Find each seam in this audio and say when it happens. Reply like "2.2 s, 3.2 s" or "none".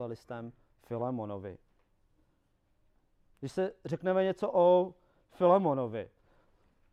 3.3 s